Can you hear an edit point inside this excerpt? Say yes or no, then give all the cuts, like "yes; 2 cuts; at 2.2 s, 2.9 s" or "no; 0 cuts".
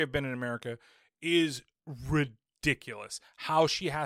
no; 0 cuts